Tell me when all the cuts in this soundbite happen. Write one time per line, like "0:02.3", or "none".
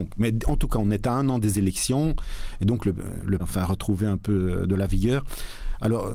0:03.4